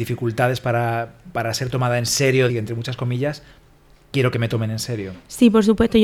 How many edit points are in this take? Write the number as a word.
one